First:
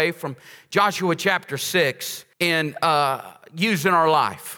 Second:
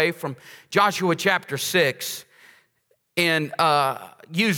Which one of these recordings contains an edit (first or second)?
first